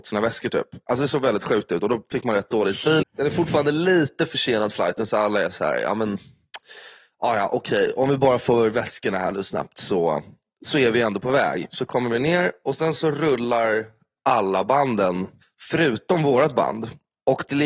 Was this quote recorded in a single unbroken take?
no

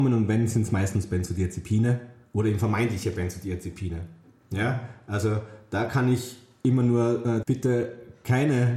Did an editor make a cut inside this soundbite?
yes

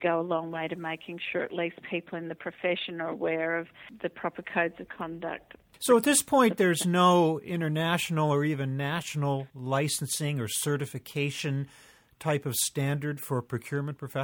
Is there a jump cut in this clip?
no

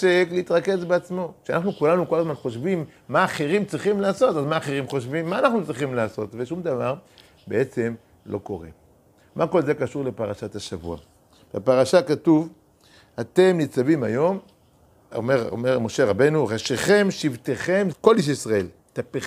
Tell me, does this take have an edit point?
yes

